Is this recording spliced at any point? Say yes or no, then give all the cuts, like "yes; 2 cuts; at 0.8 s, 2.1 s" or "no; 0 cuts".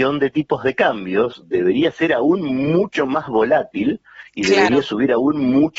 no; 0 cuts